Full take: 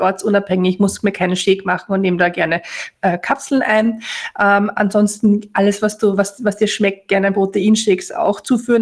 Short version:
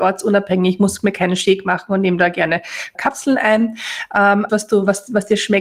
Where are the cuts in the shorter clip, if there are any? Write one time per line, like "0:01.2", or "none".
0:03.0
0:04.5